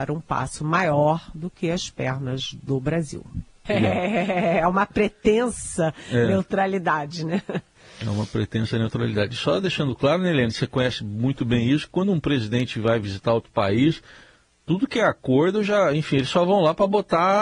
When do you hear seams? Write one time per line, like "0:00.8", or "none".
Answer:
0:03.7